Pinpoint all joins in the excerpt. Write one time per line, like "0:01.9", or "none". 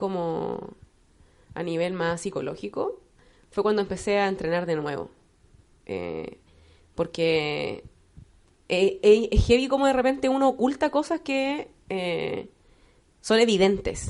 none